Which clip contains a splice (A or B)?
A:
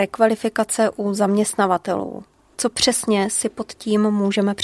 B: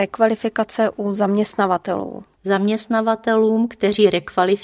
B